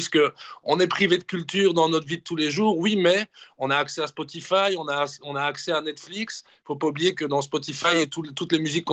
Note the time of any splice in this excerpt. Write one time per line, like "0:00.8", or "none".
none